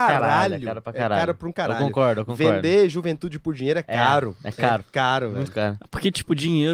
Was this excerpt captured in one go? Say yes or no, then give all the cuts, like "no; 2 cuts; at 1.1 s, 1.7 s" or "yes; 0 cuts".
yes; 0 cuts